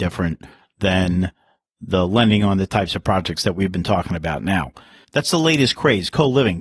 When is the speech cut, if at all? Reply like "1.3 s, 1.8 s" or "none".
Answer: 5.0 s